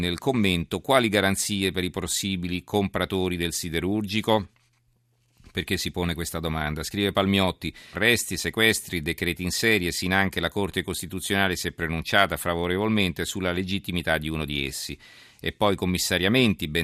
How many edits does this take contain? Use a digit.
1